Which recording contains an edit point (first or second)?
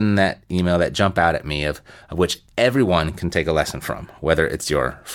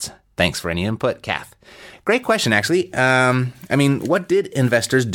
second